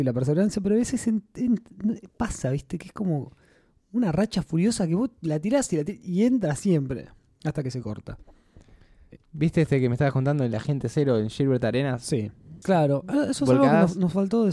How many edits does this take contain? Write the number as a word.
two